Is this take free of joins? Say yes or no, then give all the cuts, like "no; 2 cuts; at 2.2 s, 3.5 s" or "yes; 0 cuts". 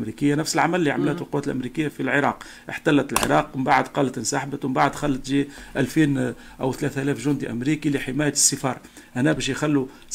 no; 1 cut; at 1.9 s